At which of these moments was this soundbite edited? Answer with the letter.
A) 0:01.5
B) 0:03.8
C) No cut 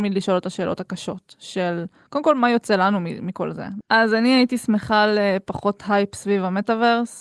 B